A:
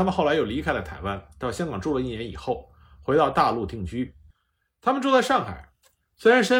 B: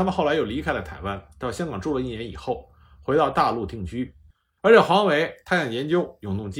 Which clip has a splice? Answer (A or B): B